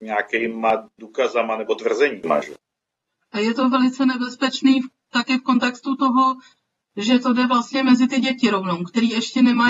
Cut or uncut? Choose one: uncut